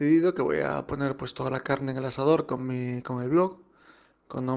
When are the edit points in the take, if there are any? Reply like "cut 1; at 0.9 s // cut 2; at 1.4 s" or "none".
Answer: none